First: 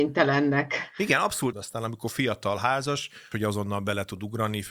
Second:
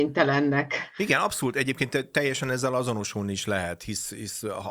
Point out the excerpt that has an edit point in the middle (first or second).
first